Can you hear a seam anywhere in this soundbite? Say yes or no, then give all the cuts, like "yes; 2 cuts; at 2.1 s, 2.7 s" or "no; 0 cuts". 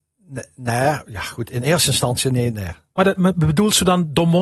yes; 1 cut; at 3.2 s